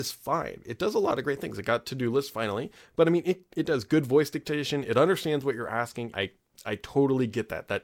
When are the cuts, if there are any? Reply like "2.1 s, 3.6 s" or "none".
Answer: 6.1 s